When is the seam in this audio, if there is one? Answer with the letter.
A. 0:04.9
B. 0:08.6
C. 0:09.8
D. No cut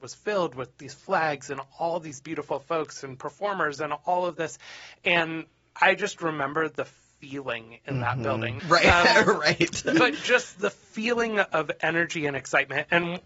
B